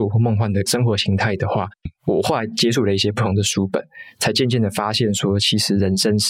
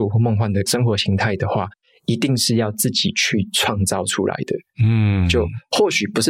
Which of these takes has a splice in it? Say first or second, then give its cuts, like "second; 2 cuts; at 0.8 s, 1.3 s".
first; 1 cut; at 1.9 s